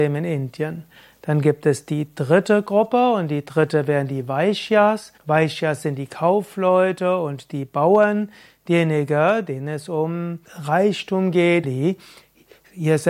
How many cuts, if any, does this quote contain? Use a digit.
3